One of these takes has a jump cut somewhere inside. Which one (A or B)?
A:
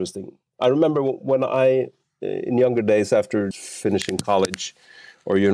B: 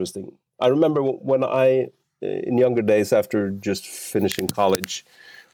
A